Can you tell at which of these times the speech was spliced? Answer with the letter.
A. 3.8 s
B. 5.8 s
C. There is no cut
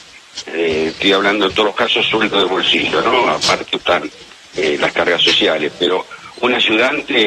A